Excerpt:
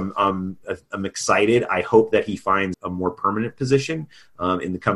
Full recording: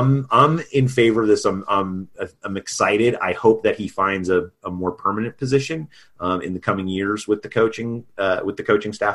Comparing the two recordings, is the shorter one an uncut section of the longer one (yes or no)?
no